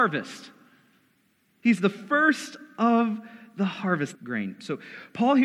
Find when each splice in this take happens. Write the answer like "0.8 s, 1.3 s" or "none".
4.1 s